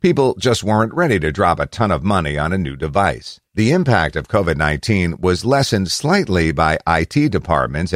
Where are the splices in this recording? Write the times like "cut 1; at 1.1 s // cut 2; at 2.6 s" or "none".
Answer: cut 1; at 3.5 s